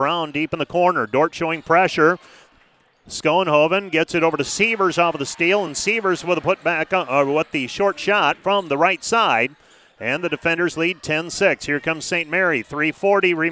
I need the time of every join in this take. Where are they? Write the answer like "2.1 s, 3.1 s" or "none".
none